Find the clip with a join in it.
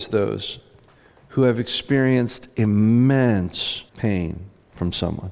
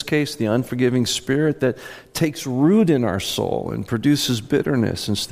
first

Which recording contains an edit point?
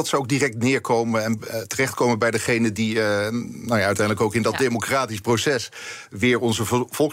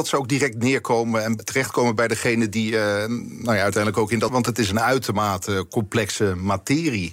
second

